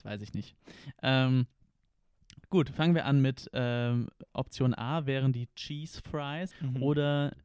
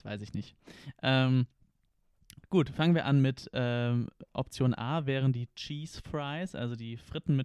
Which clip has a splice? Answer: first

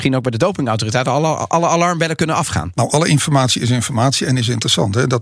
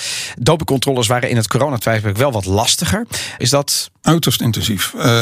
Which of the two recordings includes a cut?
second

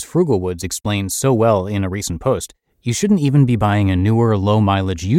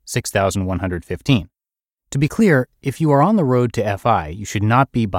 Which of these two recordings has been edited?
second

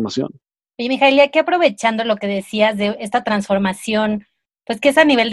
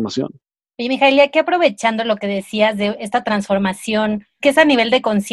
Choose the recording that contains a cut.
second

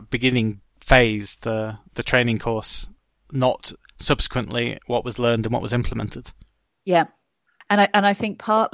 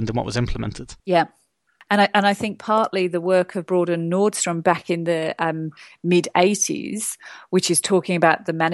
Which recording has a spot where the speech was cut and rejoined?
second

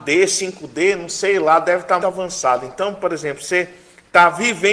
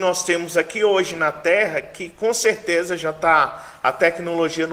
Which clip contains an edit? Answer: first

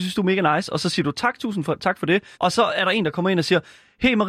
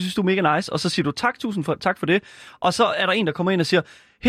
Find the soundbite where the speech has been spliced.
first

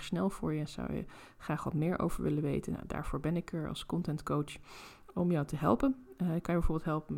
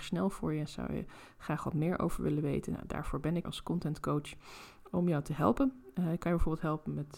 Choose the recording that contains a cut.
second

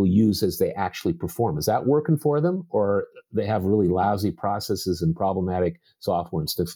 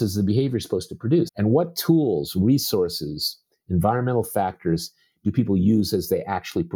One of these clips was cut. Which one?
second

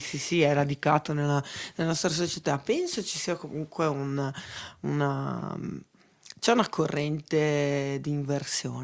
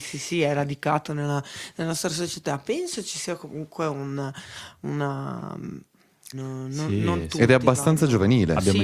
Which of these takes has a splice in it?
second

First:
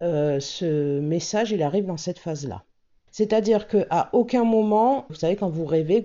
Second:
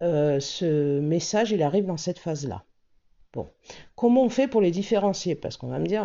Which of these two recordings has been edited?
first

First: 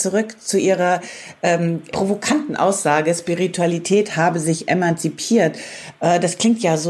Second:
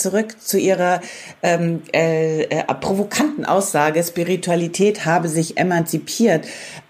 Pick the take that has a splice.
first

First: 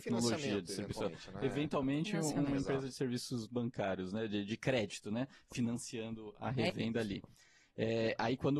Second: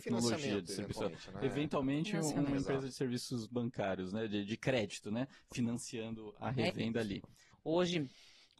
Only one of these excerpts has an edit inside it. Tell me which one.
second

